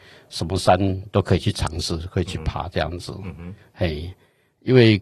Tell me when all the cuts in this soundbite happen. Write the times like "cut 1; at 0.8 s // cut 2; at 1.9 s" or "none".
none